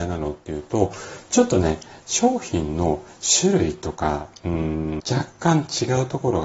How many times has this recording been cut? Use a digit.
1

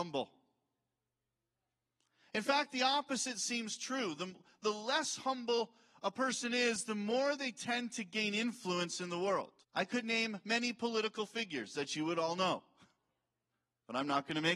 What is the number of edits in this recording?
1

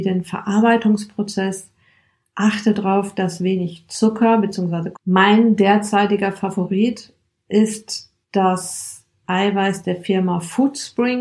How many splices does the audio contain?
2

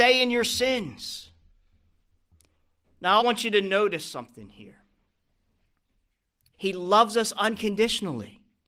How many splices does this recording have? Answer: 2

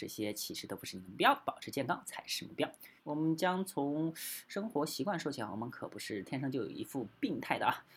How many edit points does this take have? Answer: 1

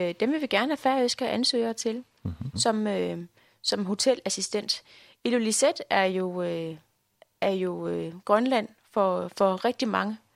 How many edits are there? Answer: 1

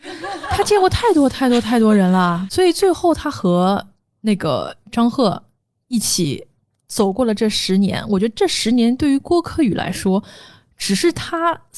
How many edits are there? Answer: 0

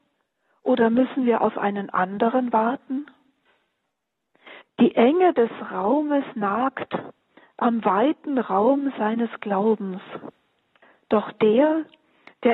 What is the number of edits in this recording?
1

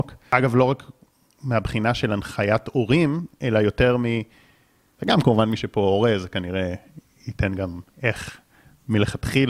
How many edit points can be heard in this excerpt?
2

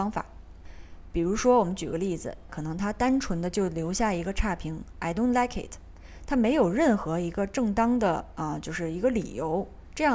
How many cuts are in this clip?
1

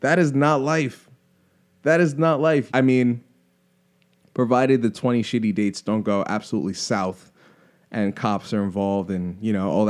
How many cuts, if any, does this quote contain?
1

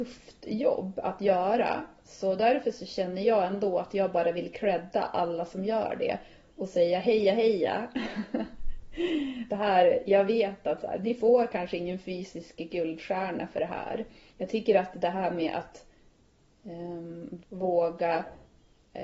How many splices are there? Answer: 3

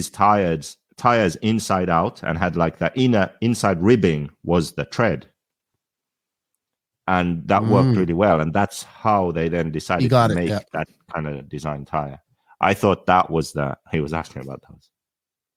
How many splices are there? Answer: 0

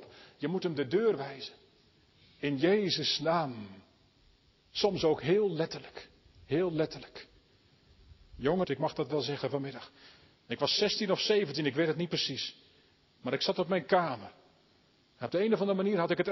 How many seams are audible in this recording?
1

